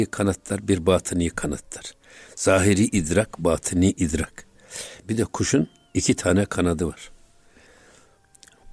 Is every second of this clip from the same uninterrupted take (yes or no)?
no